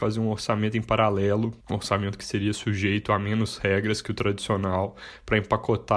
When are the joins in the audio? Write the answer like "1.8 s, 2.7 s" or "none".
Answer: 1.6 s